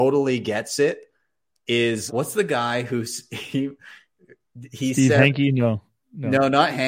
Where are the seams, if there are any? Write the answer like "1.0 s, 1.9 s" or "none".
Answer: 2.1 s

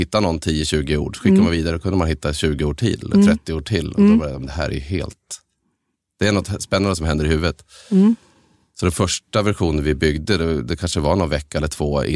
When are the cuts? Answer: none

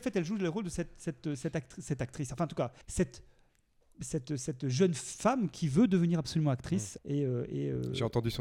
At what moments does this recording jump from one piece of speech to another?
2.8 s, 7.0 s

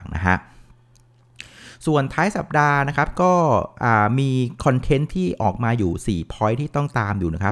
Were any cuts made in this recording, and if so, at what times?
none

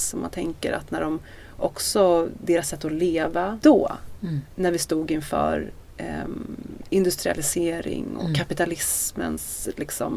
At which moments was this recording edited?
3.6 s

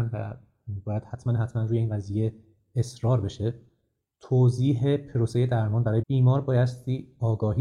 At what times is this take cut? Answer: 6.0 s

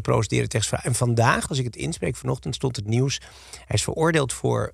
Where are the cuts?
1.5 s

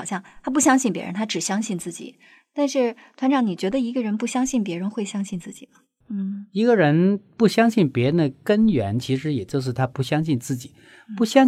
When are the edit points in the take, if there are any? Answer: 6.0 s

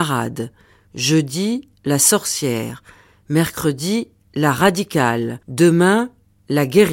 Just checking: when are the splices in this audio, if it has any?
5.4 s

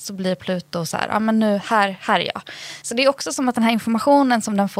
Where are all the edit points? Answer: none

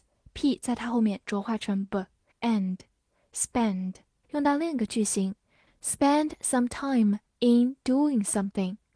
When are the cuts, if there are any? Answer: 2.3 s, 4.2 s

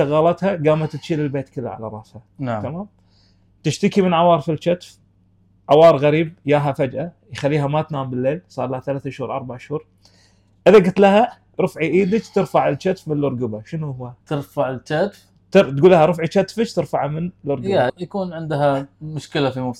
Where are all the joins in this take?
11.5 s, 14.2 s, 17.9 s

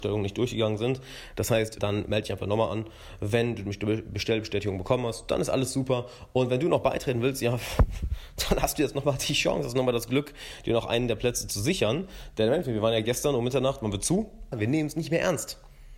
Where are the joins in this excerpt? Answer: 1.8 s, 14.5 s

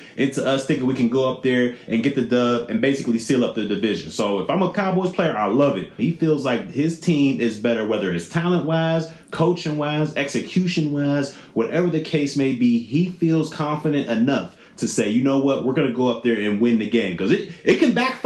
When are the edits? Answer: 6.0 s

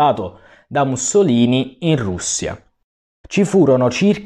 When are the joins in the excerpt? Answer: 3.2 s

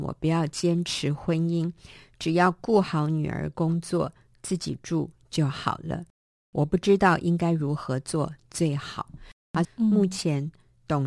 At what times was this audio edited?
9.6 s

